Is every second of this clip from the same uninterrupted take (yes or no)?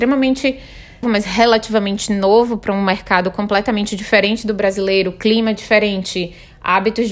no